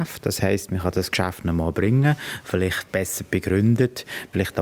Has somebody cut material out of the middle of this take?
no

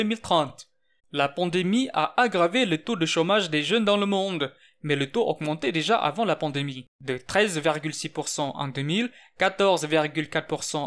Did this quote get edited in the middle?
yes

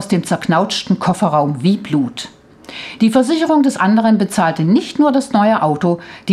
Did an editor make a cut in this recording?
no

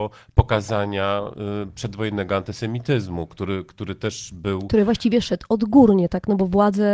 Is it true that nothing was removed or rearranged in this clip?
no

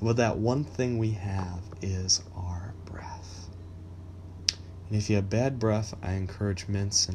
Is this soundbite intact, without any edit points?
yes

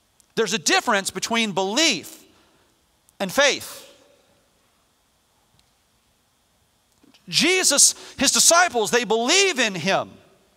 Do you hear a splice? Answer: yes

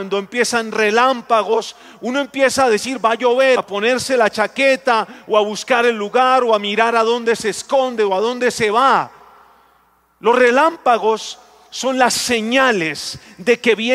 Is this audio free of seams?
no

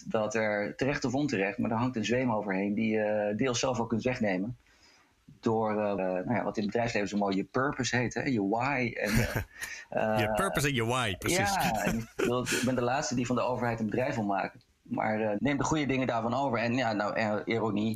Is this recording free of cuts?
no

